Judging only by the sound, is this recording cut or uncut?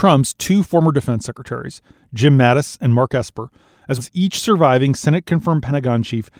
cut